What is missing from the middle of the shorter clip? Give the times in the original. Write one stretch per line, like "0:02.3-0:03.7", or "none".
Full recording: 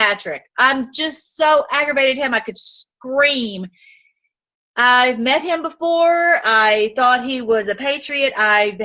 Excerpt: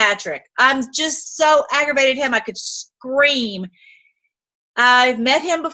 none